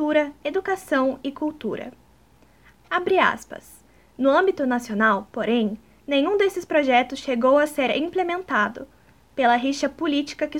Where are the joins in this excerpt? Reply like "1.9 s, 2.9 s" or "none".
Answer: none